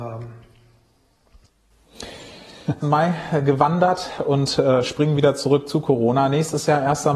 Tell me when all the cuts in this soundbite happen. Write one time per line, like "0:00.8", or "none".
0:02.8